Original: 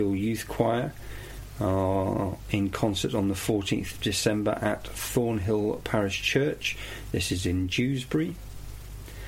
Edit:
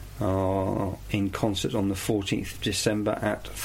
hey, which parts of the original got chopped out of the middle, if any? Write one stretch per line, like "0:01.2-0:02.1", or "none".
none